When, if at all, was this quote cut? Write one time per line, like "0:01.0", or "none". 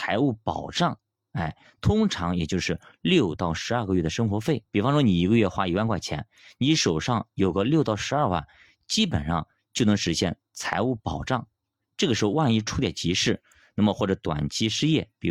0:04.7